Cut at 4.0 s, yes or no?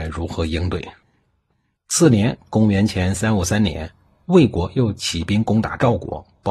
no